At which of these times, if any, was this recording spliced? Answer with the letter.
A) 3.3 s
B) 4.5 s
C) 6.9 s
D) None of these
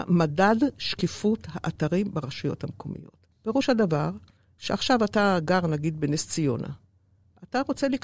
A